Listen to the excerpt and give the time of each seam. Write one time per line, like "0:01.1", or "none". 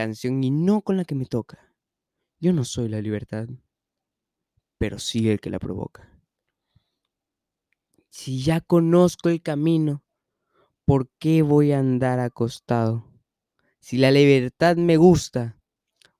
none